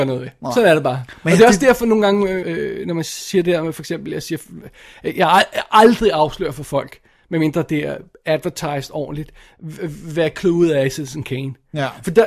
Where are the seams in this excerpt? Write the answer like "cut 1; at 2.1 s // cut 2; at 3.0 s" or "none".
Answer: cut 1; at 2.4 s